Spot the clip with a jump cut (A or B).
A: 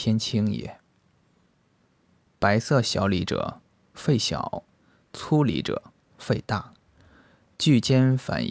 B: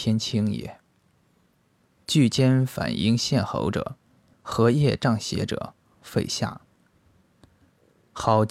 B